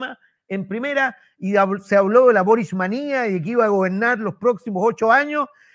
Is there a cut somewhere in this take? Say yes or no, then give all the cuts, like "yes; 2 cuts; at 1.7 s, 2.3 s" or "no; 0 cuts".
no; 0 cuts